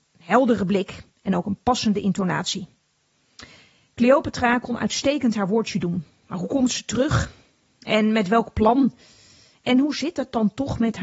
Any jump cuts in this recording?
yes; 1 cut; at 6.1 s

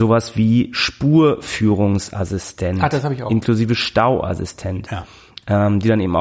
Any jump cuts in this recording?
no; 0 cuts

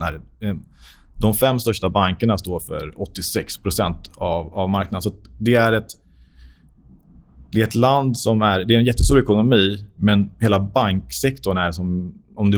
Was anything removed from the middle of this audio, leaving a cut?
no; 0 cuts

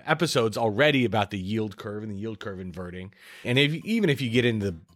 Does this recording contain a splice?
yes; 1 cut; at 3.4 s

